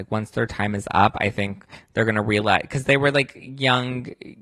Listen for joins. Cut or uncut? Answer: uncut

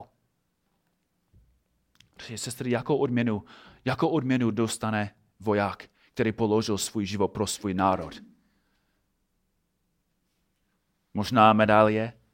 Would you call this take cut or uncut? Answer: uncut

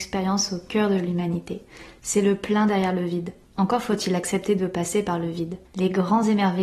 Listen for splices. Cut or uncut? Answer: cut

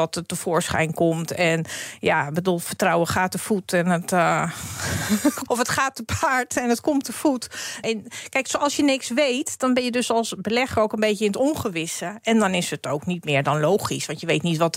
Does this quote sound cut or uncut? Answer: cut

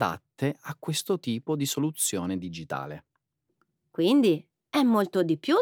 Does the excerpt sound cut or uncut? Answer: uncut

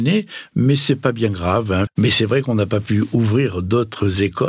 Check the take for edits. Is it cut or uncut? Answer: cut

